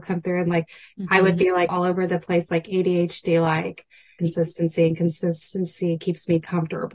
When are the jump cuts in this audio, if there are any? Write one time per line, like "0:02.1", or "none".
0:01.7
0:04.2